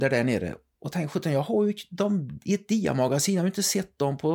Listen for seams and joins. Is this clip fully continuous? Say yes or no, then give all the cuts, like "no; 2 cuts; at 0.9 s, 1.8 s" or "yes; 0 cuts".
yes; 0 cuts